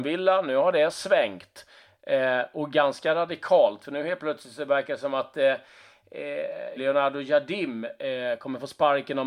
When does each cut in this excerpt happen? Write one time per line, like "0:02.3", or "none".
0:06.8